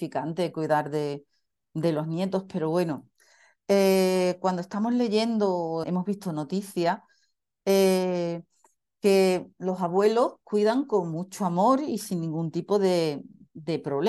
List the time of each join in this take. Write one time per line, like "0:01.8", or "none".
0:05.8